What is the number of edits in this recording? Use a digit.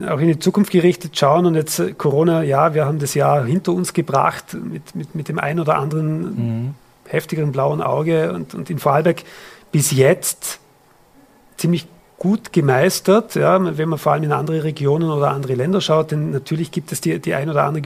0